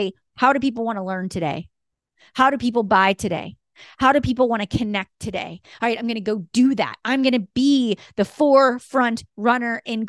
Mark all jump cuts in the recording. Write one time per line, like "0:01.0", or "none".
none